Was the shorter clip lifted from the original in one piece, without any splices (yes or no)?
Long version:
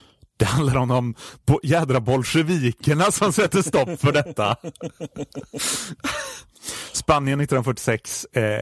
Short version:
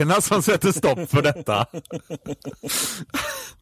yes